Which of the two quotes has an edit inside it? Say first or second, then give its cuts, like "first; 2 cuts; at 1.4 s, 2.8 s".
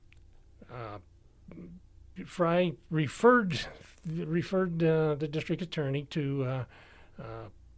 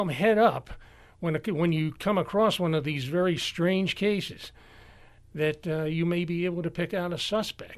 first; 1 cut; at 2.2 s